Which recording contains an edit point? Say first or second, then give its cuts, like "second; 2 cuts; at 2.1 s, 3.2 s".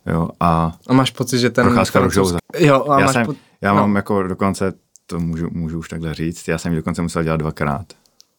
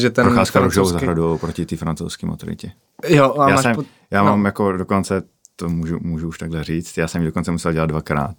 first; 1 cut; at 2.4 s